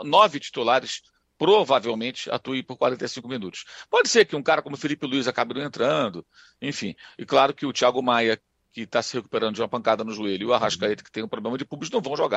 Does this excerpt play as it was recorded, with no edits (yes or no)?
yes